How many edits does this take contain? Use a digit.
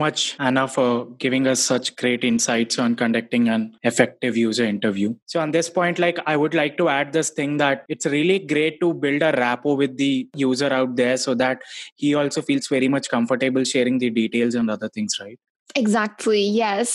0